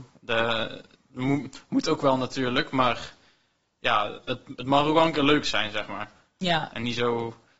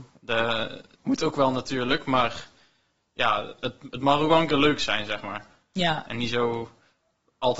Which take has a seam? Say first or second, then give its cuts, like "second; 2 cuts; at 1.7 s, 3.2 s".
second; 1 cut; at 1.0 s